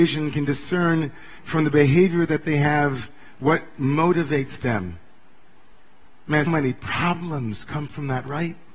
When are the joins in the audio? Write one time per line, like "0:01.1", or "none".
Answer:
0:06.5